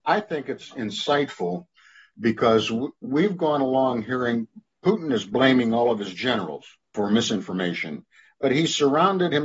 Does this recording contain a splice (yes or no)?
no